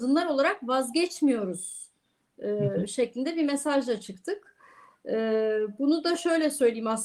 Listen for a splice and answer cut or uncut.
uncut